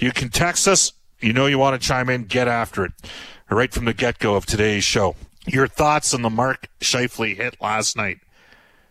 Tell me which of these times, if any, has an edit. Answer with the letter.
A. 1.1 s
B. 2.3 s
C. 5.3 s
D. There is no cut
C